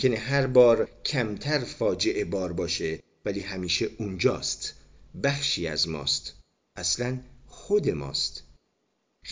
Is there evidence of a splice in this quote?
no; 0 cuts

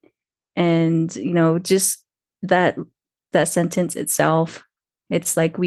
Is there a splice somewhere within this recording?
no; 0 cuts

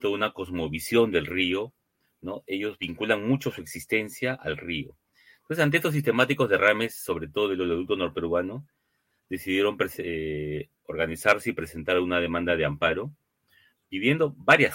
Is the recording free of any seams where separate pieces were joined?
yes; 0 cuts

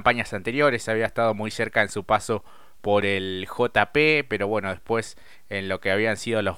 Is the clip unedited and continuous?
yes; 0 cuts

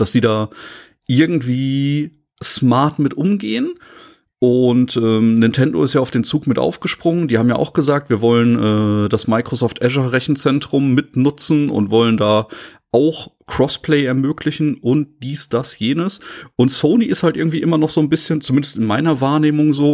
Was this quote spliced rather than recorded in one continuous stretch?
no; 0 cuts

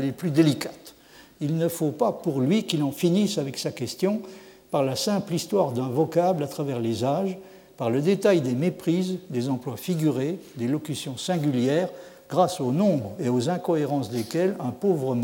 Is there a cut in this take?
no; 0 cuts

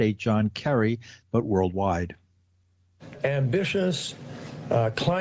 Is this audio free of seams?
no; 1 cut; at 1.2 s

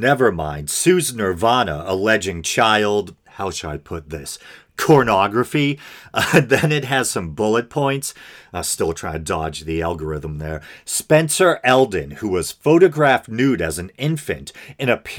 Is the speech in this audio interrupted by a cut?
no; 0 cuts

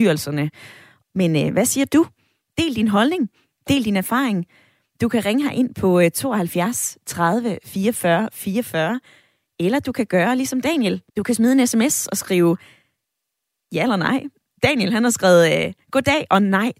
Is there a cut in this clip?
yes; 2 cuts; at 1.0 s, 11.1 s

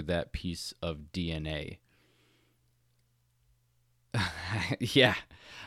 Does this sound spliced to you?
no; 0 cuts

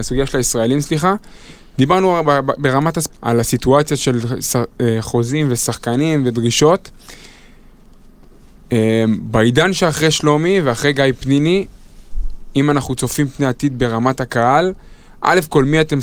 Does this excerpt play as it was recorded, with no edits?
no; 1 cut; at 3.1 s

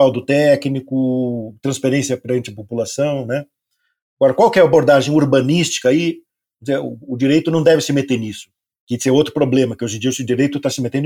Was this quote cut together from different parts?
no; 0 cuts

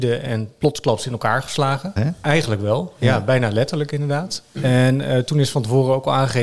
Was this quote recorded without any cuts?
no; 1 cut; at 2.0 s

